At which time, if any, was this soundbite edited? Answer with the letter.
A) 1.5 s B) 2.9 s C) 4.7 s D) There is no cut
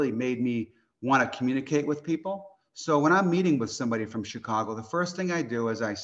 D